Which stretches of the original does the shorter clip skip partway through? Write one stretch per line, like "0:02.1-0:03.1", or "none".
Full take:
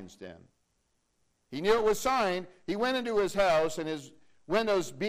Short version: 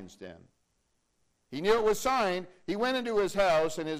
none